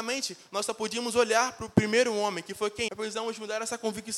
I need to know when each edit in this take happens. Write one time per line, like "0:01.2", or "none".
0:02.9